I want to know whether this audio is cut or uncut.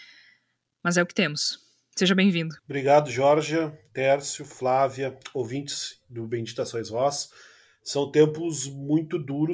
cut